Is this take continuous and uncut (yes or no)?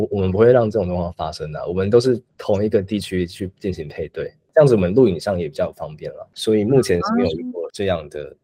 yes